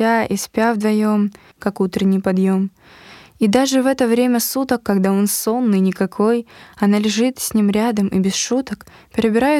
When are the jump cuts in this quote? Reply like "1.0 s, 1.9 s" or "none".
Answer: 1.5 s